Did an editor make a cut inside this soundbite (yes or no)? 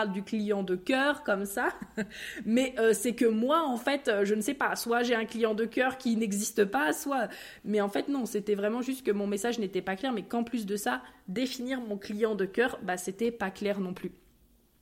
no